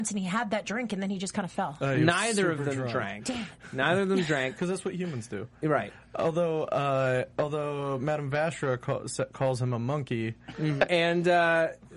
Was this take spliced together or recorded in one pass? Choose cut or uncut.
cut